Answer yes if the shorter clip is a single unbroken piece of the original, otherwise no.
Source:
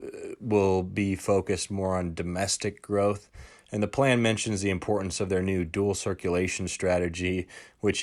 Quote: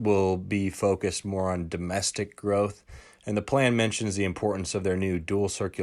yes